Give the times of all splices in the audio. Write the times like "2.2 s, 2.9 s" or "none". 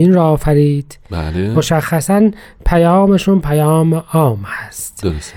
1.5 s